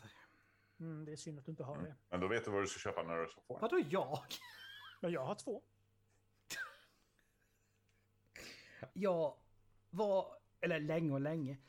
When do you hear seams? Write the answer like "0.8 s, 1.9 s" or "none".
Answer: 8.9 s